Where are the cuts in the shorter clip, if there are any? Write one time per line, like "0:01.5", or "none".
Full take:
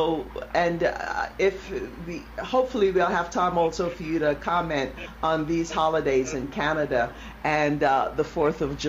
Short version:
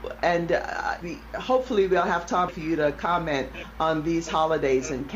0:01.0
0:02.5